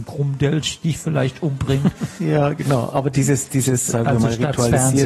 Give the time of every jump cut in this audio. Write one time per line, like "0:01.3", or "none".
0:02.2
0:03.9